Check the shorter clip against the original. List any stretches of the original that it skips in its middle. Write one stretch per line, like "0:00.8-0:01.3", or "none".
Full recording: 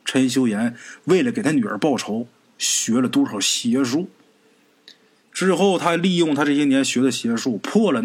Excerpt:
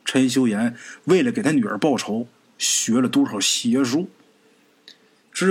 none

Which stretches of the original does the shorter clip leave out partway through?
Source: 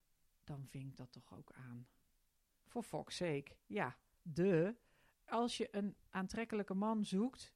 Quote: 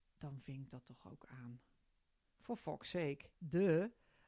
0:03.6-0:04.2

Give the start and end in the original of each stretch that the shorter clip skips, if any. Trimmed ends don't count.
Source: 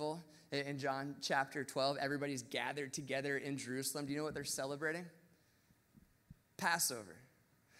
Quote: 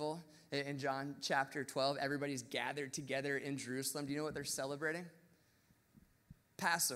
none

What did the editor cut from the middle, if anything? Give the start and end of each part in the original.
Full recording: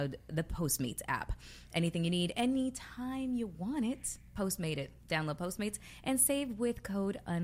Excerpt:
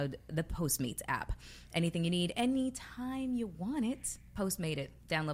none

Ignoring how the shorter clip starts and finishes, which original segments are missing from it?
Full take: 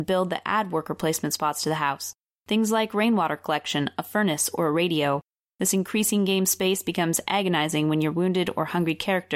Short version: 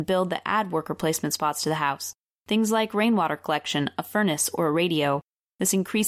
none

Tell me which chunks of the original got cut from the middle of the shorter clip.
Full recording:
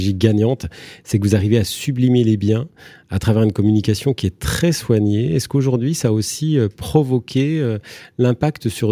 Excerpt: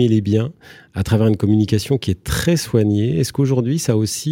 none

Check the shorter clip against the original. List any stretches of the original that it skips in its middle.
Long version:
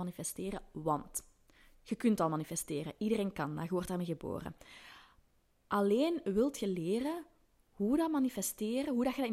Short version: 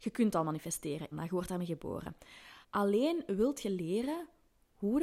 0:03.0-0:03.5
0:05.0-0:05.6

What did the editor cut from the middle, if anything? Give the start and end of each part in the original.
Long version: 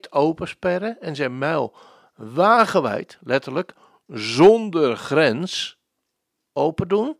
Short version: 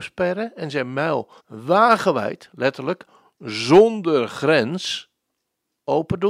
0:01.8-0:02.1

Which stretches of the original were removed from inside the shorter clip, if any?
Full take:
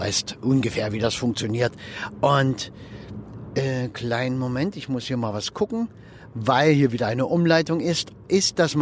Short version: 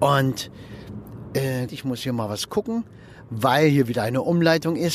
0:03.9-0:04.7

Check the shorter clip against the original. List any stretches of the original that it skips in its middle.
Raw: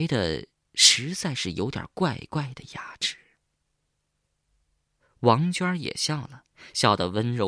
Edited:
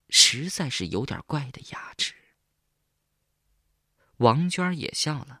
0:01.9-0:02.3

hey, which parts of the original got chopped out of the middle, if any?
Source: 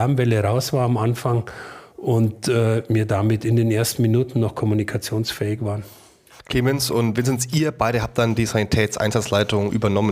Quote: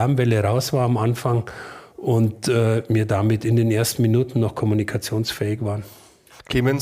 none

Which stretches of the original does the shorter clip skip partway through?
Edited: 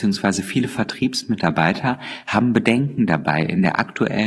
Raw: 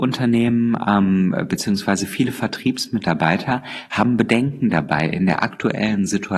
none

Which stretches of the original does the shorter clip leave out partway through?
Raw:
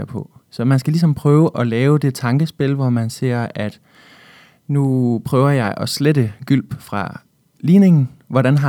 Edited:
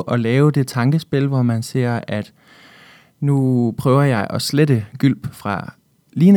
none

